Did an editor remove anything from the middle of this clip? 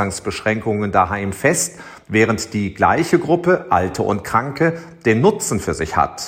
no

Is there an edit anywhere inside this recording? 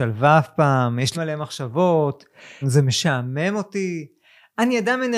yes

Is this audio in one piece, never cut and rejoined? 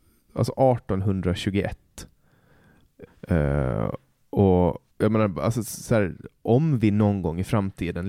no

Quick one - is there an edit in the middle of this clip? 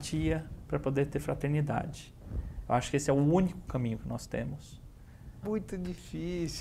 yes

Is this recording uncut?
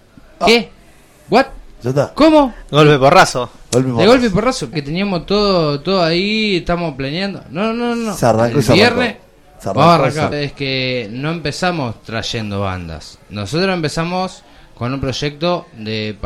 no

